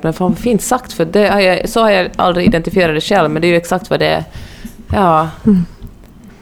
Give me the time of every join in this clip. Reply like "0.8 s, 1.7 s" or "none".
none